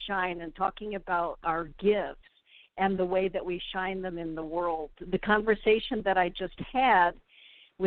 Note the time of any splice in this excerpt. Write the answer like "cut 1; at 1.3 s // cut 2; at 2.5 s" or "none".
none